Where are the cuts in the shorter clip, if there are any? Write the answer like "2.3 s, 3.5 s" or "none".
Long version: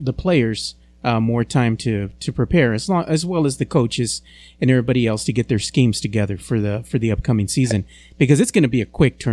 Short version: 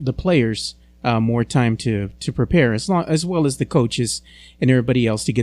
none